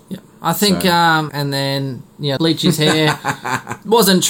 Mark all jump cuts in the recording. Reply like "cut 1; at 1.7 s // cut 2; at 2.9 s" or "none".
cut 1; at 1.3 s // cut 2; at 2.4 s